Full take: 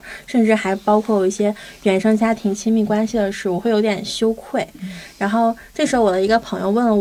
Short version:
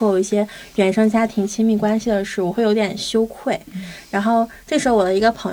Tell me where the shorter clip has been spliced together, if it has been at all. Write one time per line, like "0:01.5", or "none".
none